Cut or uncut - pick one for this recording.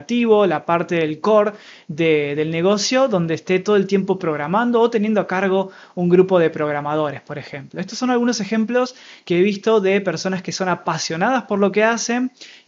uncut